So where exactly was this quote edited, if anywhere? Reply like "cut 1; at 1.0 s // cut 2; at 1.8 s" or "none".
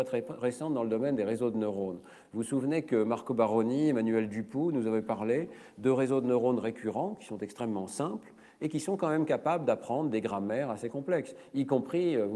none